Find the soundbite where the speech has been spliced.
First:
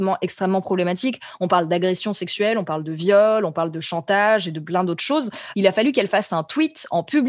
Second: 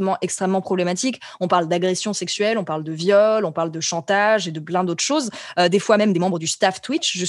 first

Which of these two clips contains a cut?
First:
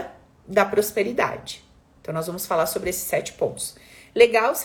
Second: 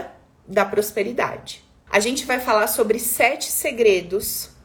second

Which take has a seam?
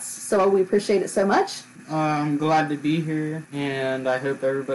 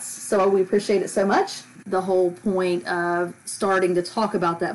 second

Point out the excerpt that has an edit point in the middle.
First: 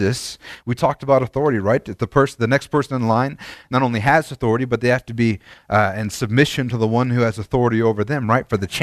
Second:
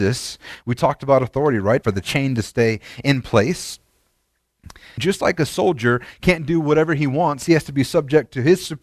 second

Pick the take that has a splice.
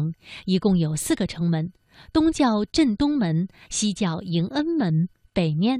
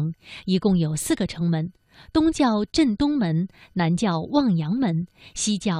first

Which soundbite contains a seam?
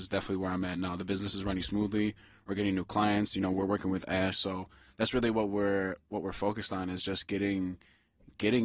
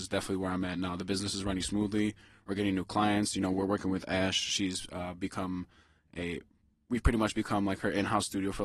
first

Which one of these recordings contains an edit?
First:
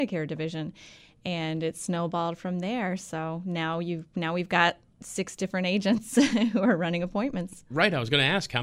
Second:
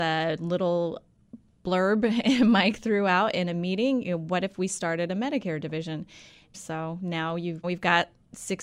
second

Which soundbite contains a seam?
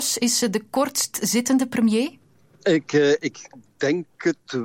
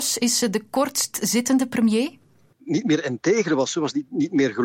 second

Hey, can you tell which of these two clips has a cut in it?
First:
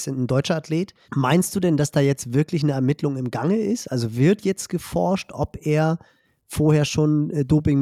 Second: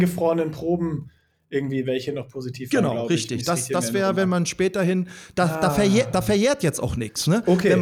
first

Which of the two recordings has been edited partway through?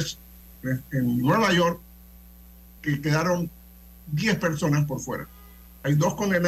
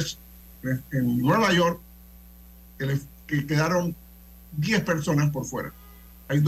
first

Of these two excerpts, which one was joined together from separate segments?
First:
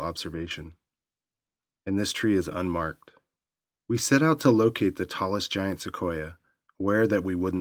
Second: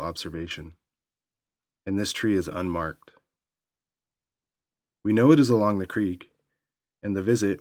first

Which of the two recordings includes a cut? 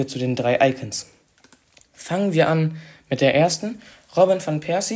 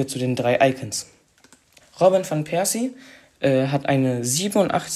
second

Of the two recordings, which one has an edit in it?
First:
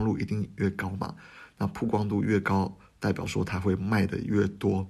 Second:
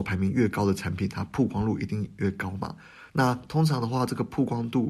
second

